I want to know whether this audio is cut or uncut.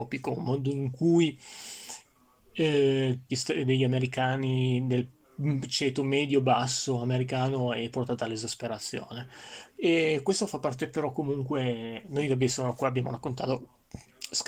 cut